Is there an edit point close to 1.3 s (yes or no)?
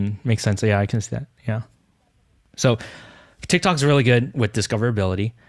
no